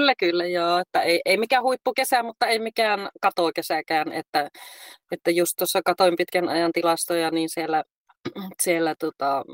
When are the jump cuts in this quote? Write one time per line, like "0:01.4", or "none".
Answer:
none

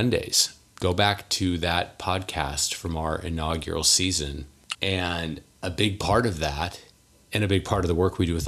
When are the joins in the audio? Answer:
0:04.7

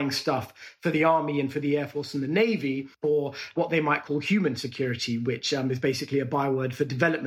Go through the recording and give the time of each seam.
0:02.9

